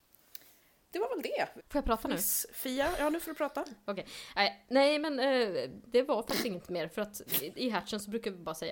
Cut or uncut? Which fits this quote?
cut